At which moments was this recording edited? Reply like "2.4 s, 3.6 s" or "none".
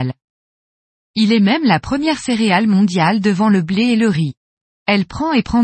4.7 s